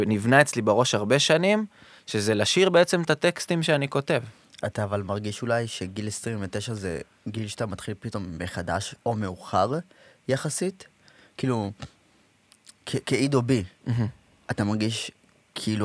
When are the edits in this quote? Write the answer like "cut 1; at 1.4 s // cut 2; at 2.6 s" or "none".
none